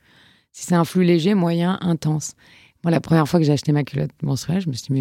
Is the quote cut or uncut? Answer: uncut